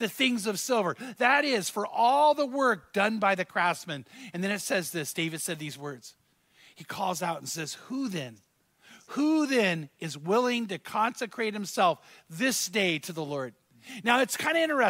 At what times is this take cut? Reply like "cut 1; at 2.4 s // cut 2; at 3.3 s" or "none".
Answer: none